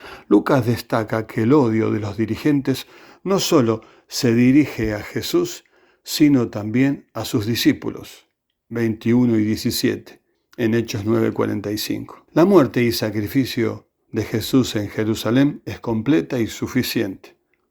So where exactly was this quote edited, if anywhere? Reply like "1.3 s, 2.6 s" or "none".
10.3 s, 12.3 s